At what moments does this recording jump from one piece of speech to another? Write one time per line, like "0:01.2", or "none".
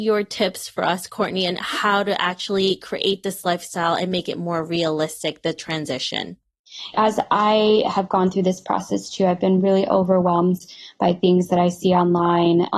0:06.9